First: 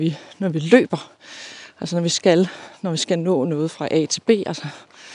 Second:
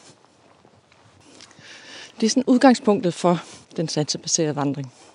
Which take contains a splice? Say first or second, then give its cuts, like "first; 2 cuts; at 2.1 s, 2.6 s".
second; 2 cuts; at 2.1 s, 3.6 s